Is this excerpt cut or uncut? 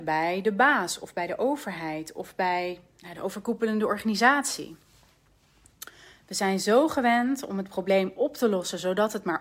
uncut